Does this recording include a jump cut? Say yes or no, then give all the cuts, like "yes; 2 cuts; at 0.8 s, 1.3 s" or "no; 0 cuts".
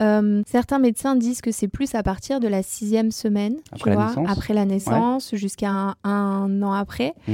no; 0 cuts